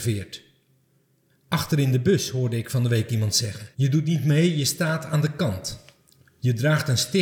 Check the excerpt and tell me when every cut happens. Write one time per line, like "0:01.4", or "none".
0:01.3
0:03.7